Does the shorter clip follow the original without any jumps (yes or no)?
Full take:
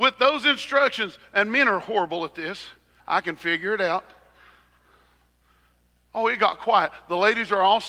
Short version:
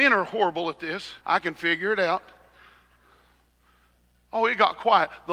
no